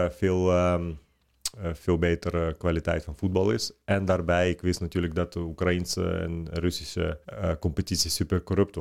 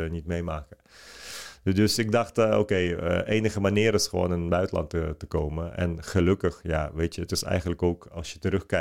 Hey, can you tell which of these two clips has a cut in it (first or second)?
first